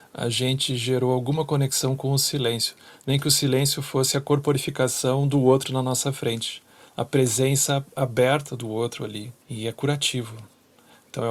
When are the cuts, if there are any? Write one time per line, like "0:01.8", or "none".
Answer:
0:09.4